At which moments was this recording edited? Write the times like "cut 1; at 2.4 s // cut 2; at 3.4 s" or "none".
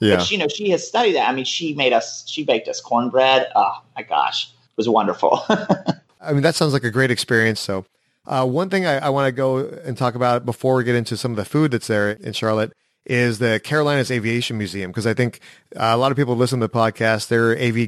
cut 1; at 7.5 s